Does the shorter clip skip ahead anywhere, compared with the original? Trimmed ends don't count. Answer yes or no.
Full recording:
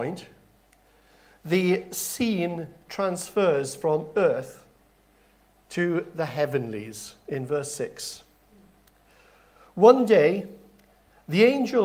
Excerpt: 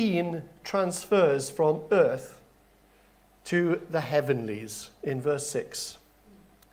no